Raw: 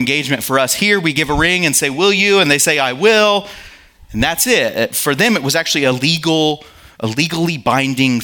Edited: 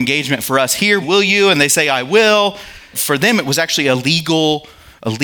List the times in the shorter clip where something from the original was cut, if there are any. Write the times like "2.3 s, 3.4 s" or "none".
1.0 s, 2.9 s